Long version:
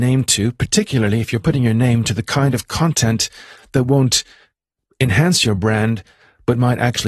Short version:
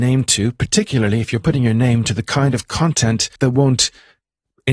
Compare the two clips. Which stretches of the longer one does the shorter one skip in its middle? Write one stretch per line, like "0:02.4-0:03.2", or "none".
0:03.4-0:03.7